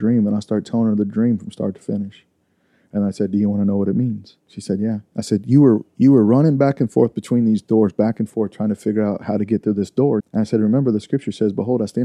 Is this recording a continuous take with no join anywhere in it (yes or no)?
no